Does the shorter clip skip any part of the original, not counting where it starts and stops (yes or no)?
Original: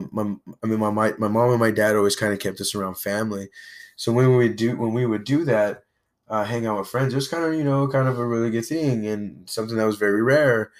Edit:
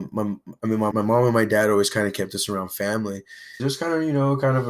yes